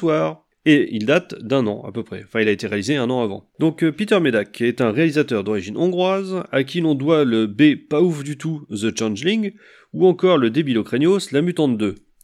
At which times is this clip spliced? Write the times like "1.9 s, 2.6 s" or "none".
none